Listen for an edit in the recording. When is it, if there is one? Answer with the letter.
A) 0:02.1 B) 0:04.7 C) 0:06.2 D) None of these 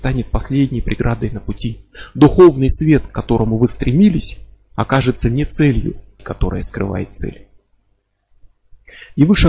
C